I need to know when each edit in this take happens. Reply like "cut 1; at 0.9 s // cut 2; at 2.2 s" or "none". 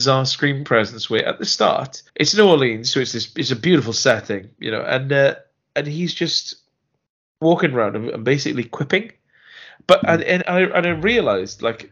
cut 1; at 2.1 s